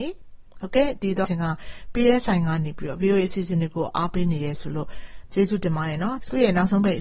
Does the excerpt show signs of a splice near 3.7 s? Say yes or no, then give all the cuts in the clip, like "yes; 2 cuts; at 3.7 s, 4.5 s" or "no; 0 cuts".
no; 1 cut; at 1.2 s